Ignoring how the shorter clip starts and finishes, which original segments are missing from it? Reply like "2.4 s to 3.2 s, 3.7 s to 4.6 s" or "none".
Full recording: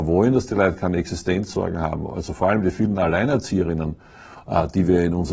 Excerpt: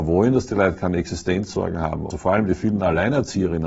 2.1 s to 2.3 s